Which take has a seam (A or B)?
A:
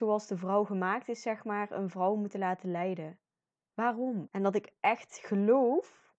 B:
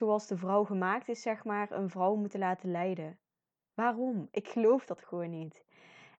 A